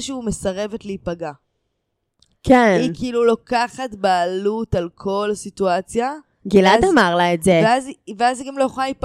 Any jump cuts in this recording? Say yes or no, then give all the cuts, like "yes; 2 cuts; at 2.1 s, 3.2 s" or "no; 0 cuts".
no; 0 cuts